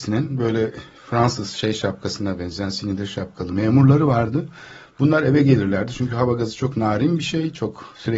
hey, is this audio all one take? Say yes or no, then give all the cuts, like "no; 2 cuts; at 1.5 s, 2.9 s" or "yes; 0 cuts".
yes; 0 cuts